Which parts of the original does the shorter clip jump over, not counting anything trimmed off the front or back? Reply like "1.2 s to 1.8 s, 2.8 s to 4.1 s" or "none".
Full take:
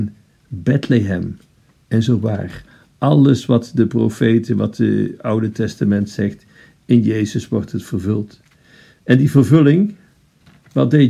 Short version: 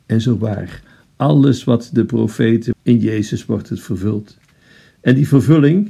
4.5 s to 6.8 s